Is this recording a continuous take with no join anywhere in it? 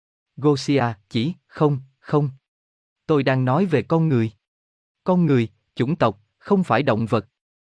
no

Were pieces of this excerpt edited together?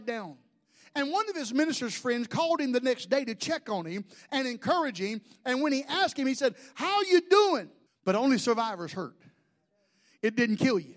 yes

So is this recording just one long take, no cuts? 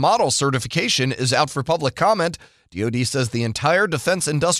yes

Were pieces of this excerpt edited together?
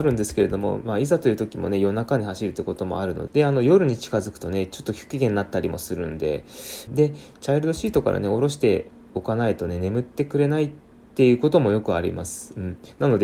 yes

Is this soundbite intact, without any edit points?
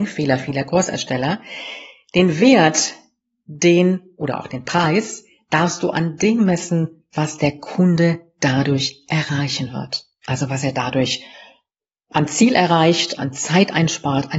no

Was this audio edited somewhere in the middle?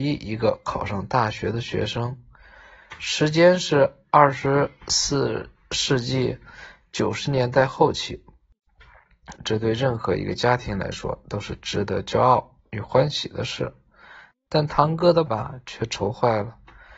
yes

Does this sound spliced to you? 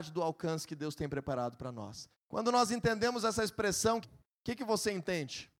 yes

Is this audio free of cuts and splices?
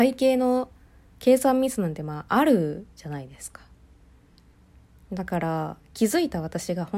yes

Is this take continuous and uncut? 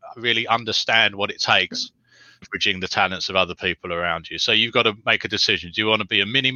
no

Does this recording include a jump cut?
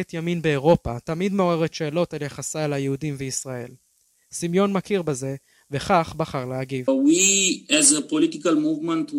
no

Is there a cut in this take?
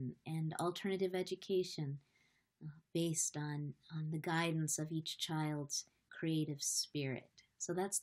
no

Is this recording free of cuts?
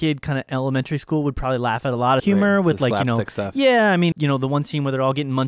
no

